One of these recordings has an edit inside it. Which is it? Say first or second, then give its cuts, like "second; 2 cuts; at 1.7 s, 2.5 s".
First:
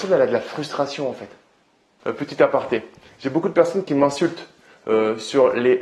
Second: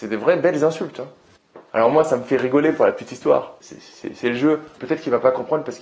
second; 2 cuts; at 3.6 s, 4.8 s